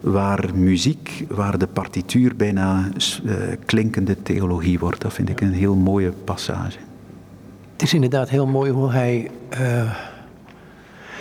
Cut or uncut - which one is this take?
uncut